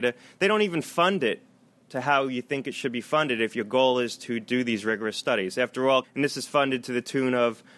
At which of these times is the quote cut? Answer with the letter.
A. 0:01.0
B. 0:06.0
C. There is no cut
B